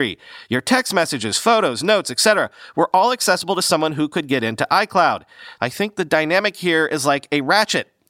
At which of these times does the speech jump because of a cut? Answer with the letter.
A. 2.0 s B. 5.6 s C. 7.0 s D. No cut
B